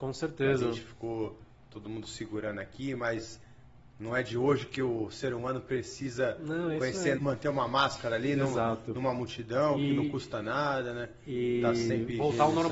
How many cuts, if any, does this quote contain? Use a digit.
1